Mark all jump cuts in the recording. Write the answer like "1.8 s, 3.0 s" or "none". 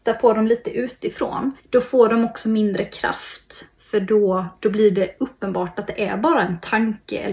1.6 s